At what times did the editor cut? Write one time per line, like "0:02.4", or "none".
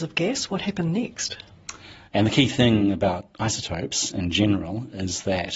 0:02.0
0:03.3